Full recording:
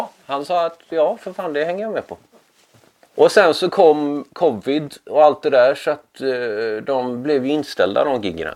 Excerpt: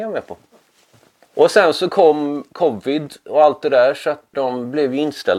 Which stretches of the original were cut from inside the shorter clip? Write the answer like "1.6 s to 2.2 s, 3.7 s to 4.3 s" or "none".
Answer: 6.1 s to 6.9 s

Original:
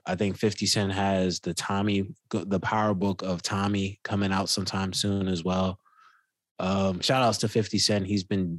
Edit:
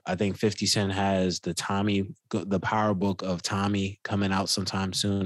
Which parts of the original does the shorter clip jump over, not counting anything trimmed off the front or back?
none

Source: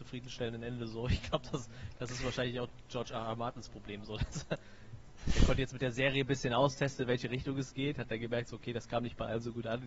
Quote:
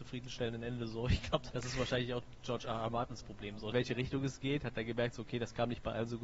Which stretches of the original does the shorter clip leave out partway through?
1.5 s to 2.0 s, 4.2 s to 7.1 s

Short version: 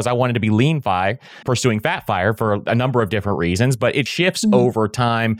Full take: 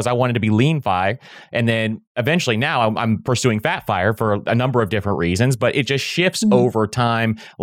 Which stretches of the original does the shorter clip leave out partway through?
1.4 s to 3.2 s, 5.9 s to 6.0 s

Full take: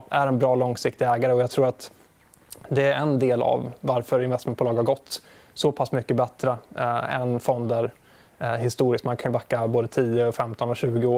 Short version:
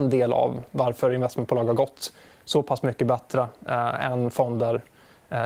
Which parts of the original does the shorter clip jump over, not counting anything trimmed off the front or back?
none

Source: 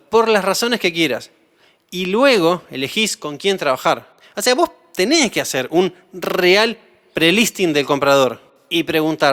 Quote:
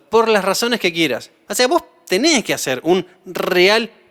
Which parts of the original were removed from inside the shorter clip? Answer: 1.5 s to 4.3 s

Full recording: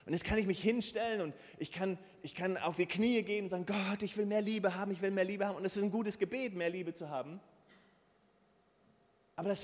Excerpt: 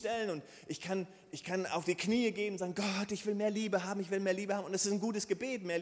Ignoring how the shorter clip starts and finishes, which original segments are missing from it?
none

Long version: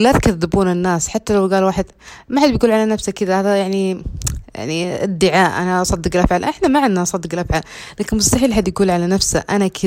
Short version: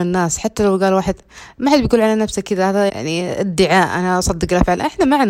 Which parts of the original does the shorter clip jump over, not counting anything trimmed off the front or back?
3.6 s to 4.5 s

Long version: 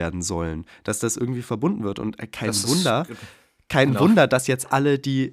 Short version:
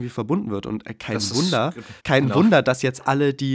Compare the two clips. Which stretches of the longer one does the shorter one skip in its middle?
3.3 s to 3.6 s

